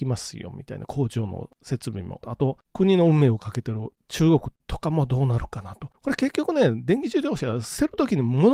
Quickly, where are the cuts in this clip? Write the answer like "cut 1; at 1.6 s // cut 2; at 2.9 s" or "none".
cut 1; at 2.2 s